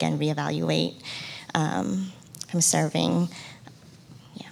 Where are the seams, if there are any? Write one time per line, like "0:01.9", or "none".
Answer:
none